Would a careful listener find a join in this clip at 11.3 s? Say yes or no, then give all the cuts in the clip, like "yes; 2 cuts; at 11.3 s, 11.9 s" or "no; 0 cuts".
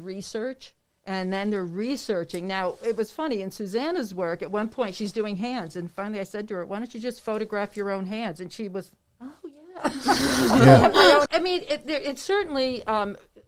yes; 1 cut; at 11.3 s